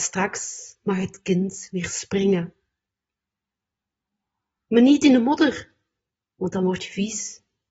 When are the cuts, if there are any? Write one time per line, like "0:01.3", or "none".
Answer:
none